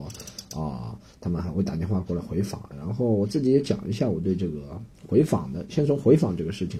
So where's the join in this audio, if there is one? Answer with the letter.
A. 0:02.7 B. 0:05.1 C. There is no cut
A